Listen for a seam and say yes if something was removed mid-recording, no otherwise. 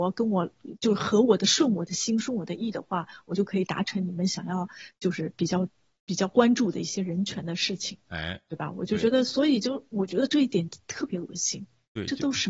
no